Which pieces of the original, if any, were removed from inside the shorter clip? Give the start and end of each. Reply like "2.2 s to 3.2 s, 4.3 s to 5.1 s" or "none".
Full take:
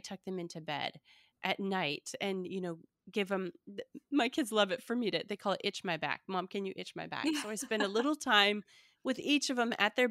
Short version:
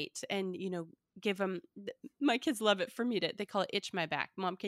none